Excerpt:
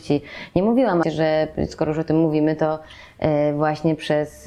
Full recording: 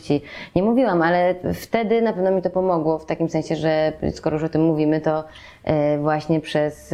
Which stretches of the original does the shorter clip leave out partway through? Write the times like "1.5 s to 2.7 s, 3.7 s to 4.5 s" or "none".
1.0 s to 3.5 s